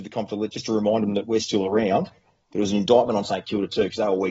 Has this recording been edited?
no; 0 cuts

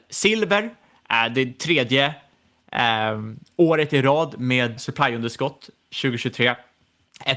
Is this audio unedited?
no; 1 cut; at 4.8 s

